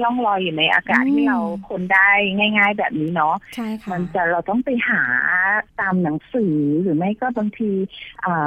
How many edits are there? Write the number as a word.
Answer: one